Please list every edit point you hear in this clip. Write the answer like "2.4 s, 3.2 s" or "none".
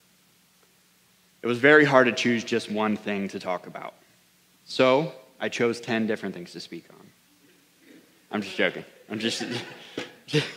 none